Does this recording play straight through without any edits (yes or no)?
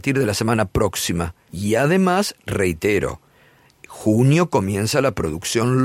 no